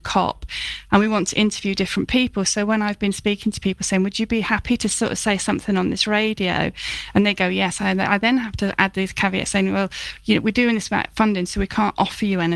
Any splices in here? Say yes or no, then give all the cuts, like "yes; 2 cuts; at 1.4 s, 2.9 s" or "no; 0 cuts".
no; 0 cuts